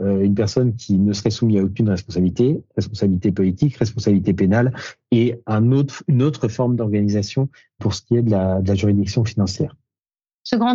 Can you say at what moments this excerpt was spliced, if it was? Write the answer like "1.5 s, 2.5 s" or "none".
none